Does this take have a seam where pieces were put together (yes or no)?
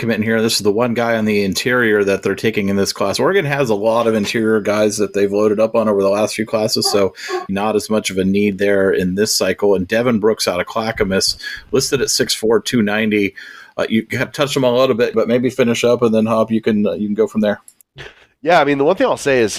yes